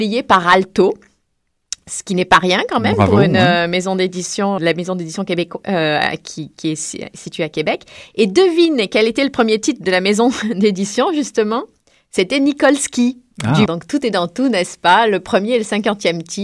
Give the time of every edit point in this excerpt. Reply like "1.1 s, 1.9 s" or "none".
4.6 s, 13.7 s